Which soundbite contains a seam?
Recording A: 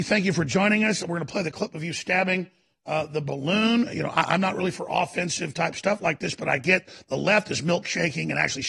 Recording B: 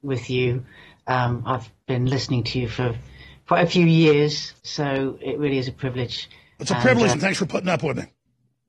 B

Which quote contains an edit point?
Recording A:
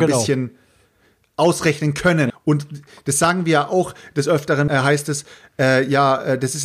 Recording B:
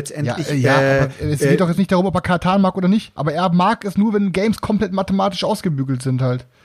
A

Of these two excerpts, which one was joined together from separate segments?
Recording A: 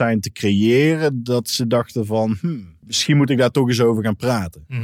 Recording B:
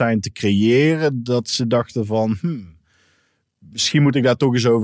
A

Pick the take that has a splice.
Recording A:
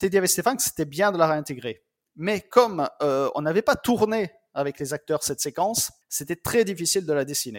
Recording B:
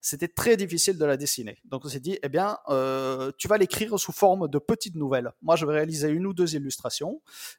A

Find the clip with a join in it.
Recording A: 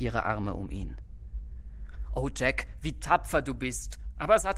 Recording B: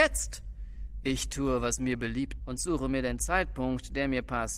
B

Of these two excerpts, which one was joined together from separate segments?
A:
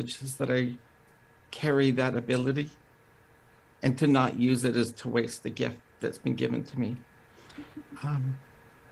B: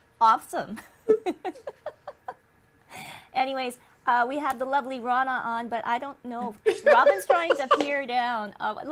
B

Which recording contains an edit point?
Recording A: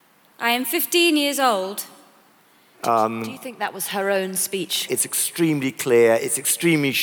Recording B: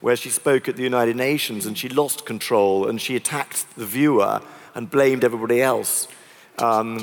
A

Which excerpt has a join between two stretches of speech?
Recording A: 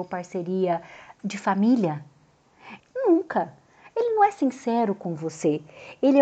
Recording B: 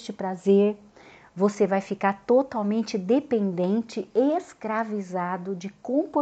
A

